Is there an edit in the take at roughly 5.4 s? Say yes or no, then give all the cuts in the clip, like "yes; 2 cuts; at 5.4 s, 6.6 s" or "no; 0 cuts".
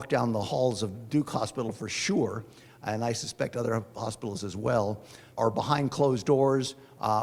yes; 1 cut; at 5.4 s